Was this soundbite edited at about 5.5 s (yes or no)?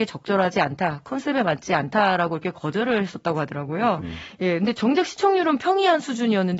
no